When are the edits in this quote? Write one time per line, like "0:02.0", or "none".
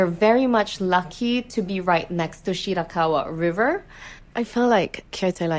0:04.2